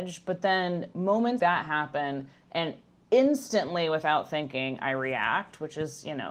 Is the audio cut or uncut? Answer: cut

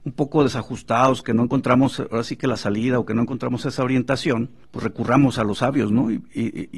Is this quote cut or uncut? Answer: cut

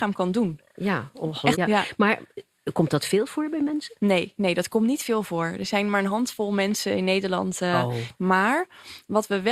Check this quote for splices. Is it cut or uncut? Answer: cut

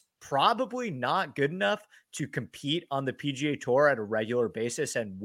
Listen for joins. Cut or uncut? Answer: uncut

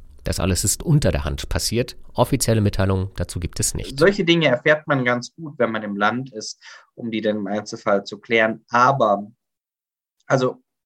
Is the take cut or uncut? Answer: uncut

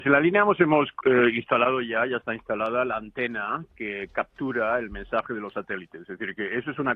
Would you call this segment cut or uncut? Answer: uncut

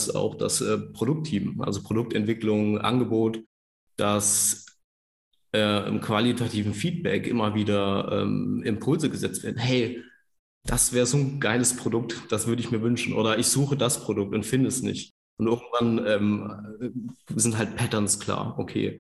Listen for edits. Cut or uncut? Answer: uncut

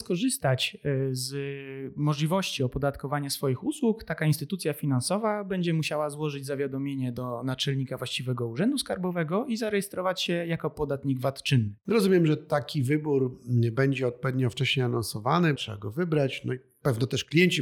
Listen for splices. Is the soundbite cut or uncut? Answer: cut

